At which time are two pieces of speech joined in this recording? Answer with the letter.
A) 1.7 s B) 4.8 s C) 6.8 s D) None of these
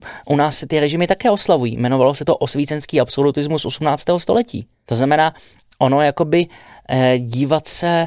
B